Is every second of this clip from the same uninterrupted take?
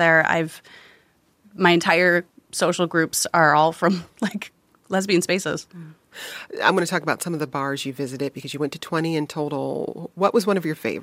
yes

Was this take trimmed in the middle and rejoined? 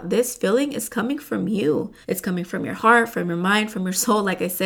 yes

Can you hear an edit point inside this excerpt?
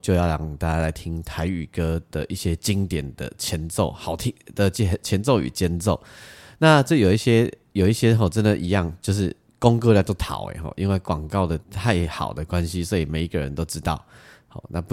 yes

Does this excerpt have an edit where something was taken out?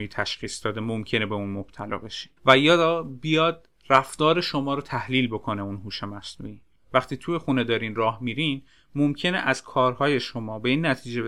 yes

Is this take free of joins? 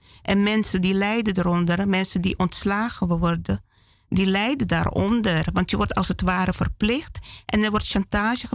yes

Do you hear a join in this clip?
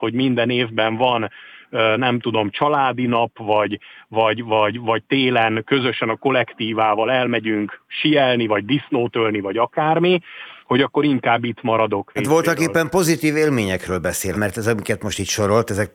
yes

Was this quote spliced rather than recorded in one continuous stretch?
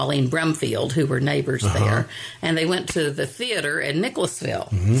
no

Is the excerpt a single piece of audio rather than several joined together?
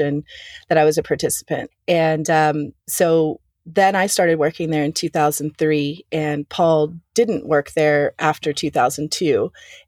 no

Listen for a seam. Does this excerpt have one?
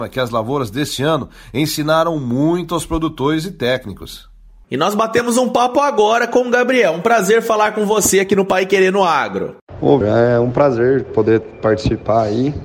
yes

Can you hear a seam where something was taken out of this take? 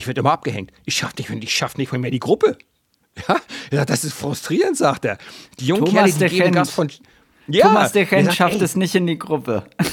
no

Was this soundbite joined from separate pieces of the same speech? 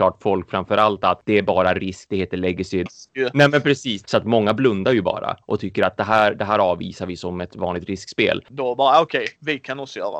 yes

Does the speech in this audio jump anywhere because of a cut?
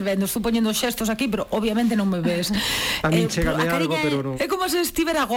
yes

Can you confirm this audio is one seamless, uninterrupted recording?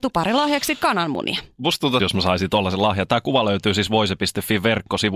no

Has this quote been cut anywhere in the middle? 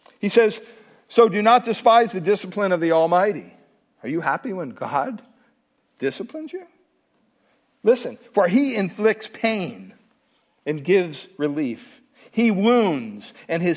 no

